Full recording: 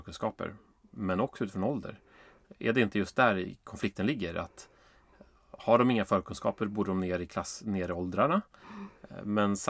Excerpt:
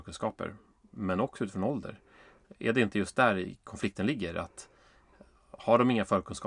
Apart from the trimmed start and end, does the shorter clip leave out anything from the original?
no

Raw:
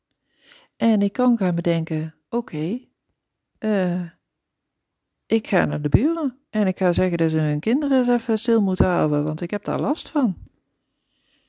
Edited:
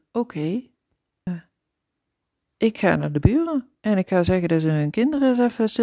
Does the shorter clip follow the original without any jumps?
no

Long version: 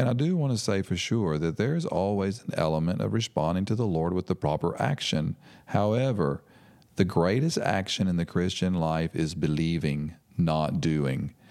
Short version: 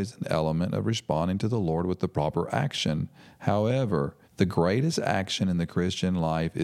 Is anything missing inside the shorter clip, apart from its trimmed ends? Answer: yes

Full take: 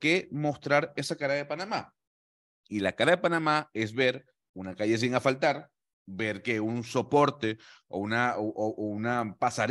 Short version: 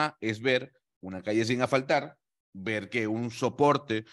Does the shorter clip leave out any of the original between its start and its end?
no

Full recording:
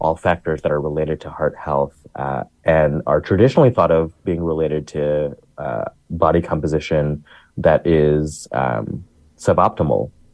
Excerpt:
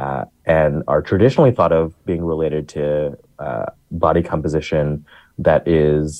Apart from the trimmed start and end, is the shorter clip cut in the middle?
no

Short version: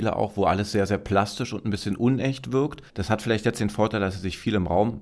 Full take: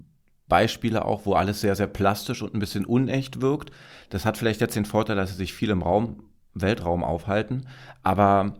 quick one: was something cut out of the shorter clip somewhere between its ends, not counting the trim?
yes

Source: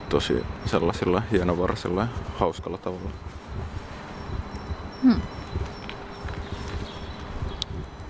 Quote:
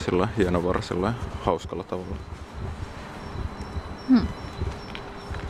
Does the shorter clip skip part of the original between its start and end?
no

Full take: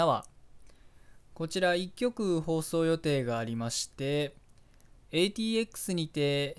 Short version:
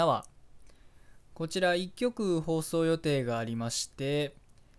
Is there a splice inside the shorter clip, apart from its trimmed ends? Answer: no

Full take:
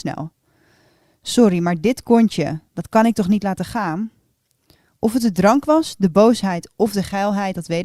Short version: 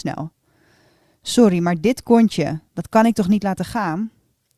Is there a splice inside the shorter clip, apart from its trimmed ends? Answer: no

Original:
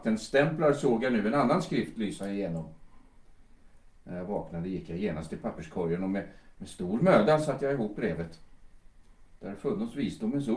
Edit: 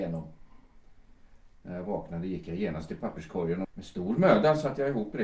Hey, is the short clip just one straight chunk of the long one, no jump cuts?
no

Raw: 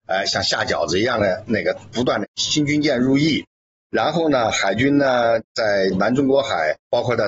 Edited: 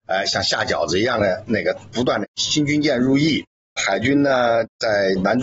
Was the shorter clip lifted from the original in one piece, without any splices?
no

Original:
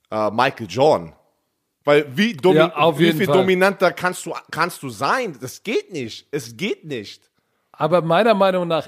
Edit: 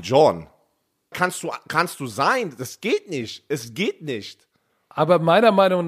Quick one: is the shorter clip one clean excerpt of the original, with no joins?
no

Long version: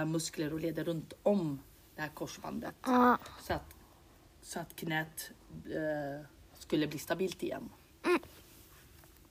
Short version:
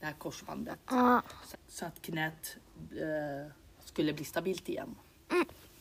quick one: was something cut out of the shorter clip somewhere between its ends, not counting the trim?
yes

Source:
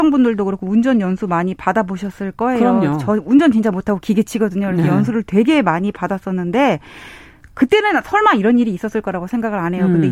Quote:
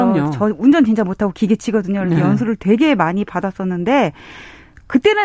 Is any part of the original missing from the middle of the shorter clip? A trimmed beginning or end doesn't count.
no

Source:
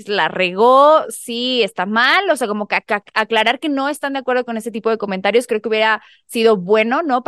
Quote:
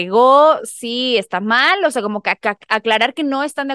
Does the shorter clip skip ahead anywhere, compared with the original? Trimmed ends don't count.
no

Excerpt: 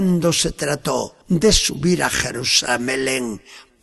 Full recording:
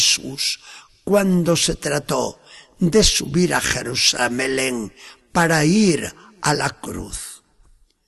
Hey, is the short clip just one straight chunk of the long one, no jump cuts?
no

